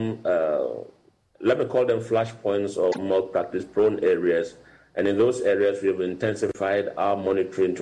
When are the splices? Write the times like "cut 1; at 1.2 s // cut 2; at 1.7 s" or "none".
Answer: none